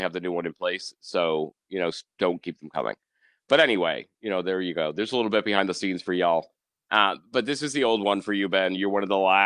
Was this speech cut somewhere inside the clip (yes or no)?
no